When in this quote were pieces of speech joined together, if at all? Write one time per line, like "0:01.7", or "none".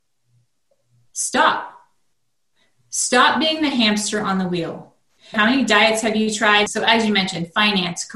0:05.3
0:06.7